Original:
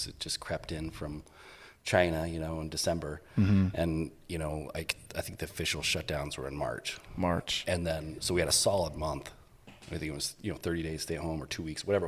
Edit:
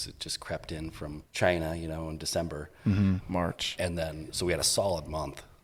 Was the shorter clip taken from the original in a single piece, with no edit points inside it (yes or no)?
no